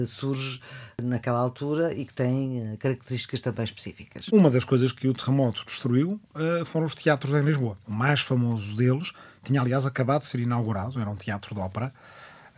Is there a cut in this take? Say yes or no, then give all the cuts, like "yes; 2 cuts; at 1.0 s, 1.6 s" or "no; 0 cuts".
yes; 2 cuts; at 4.3 s, 7.8 s